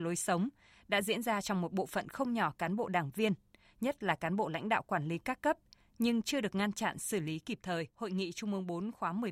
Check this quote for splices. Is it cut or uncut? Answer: cut